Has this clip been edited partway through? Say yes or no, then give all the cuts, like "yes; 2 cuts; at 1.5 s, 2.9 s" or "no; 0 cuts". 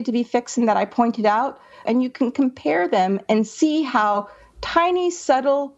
yes; 1 cut; at 1.9 s